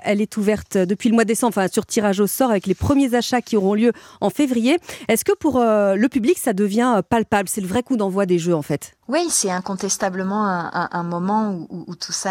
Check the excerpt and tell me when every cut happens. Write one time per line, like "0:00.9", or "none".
none